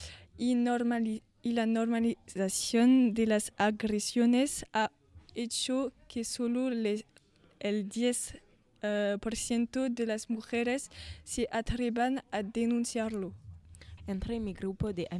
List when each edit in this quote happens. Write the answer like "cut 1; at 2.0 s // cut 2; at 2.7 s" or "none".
cut 1; at 14.0 s